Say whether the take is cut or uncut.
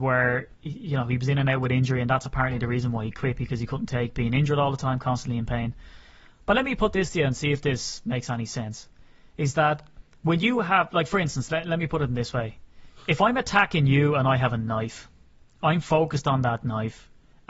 uncut